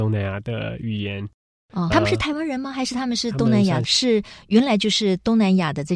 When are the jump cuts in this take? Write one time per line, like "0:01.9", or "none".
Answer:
0:01.9
0:03.8